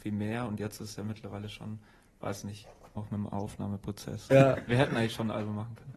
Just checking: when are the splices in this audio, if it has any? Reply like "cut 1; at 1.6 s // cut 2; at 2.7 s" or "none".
cut 1; at 3.0 s // cut 2; at 4.3 s